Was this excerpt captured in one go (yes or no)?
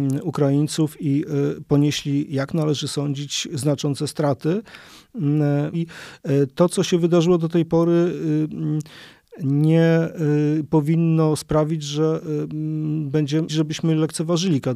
no